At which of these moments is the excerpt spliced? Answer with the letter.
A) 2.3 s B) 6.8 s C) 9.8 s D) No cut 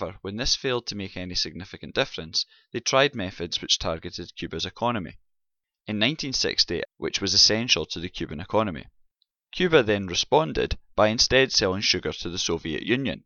B